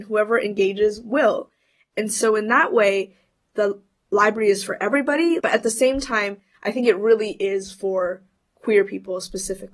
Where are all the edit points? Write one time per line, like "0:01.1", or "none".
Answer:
0:05.4